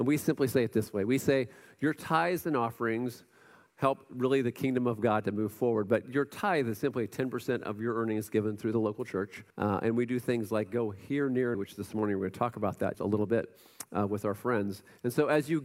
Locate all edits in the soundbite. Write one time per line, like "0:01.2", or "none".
0:09.5
0:11.5
0:12.9